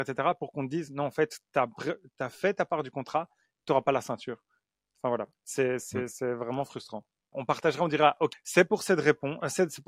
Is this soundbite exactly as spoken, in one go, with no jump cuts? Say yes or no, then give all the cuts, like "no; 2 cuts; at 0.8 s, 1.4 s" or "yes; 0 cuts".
no; 2 cuts; at 7.3 s, 8.3 s